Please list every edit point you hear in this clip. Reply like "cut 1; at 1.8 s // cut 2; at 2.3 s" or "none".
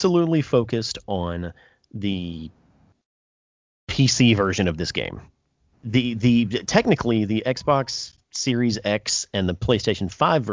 cut 1; at 5.7 s // cut 2; at 8.2 s